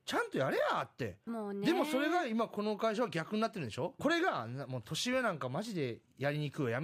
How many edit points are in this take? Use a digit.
2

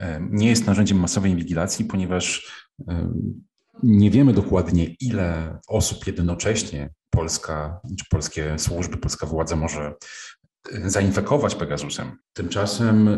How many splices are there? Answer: 1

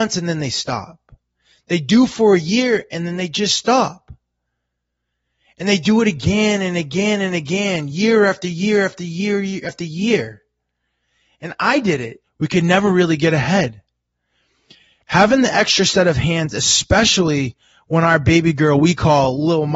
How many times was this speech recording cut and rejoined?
1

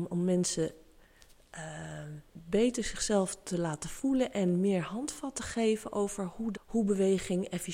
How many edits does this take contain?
2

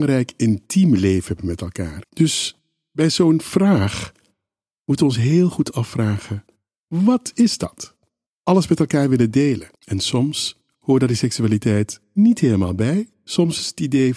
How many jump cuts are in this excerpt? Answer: 3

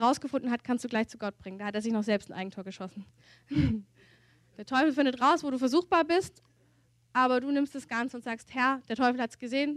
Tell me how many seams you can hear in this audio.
0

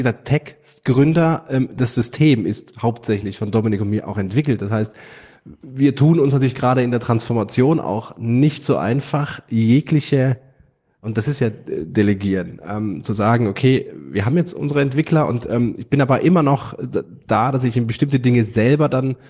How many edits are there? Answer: 0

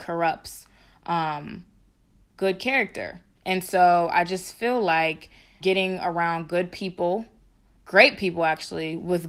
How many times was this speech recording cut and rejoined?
1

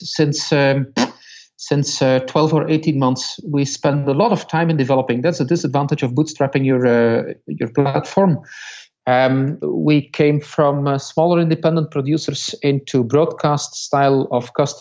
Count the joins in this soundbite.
1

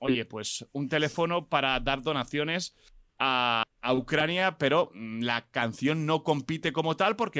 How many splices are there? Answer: 1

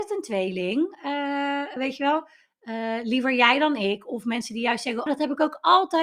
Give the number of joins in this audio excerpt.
2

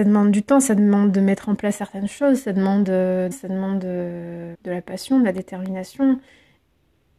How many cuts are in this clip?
2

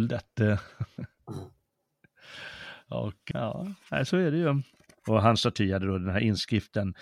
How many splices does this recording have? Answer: 2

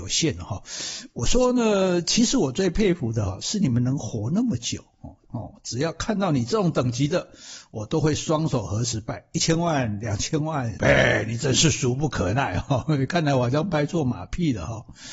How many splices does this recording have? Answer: 2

